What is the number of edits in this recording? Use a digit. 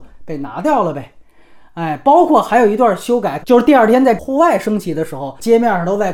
1